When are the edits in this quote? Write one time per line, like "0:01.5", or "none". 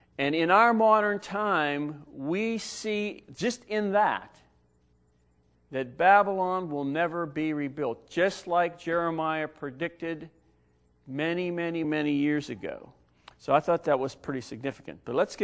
0:11.8
0:13.3